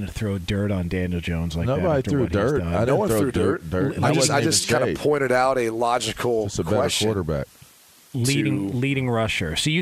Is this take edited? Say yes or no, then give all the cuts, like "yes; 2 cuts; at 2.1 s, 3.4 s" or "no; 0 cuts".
no; 0 cuts